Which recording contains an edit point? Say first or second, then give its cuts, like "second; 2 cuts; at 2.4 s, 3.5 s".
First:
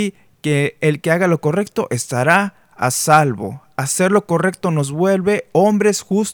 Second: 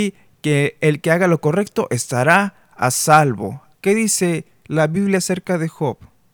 second; 1 cut; at 3.7 s